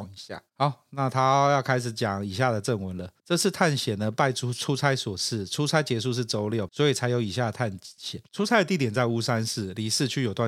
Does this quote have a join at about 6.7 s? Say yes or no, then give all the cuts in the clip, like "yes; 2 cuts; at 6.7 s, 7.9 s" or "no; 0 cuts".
yes; 1 cut; at 6.7 s